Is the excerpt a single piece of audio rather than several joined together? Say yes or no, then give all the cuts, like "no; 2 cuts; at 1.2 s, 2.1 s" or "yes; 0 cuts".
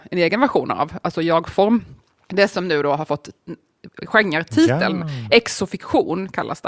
yes; 0 cuts